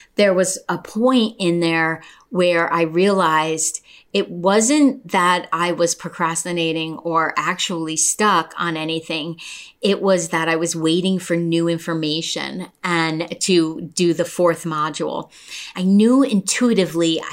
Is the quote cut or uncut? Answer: cut